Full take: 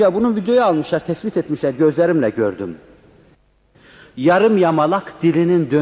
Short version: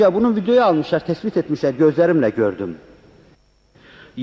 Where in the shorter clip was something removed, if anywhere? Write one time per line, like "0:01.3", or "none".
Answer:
none